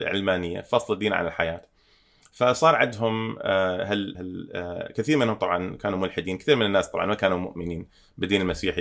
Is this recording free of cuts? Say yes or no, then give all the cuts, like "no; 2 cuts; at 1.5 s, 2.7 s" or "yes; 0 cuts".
no; 1 cut; at 4.1 s